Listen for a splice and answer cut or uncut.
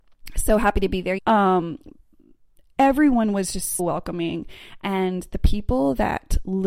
cut